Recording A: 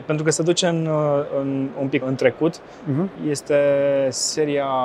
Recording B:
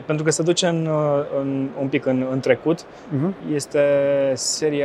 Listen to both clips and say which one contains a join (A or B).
A